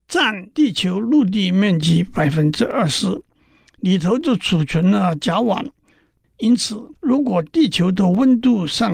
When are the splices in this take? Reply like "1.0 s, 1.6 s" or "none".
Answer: 6.2 s